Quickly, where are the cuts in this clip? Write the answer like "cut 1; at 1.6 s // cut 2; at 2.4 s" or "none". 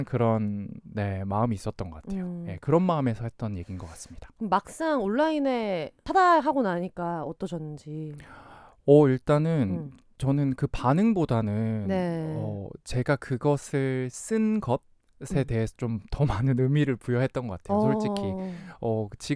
none